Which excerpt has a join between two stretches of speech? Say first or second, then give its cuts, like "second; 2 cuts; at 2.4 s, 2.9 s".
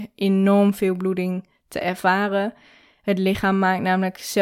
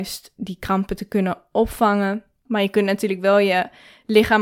second; 1 cut; at 2.5 s